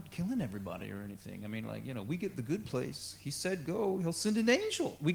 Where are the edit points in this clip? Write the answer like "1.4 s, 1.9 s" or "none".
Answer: none